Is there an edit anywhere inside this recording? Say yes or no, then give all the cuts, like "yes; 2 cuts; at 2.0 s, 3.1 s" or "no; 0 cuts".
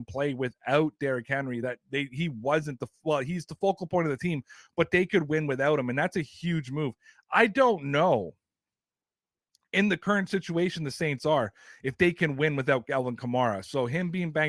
no; 0 cuts